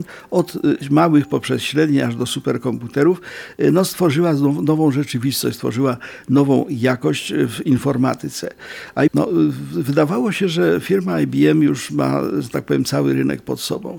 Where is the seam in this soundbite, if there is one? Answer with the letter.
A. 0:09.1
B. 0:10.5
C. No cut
A